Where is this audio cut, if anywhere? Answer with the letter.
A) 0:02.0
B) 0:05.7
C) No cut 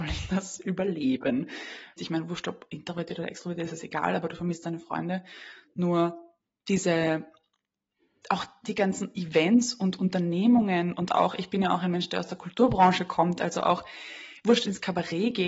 A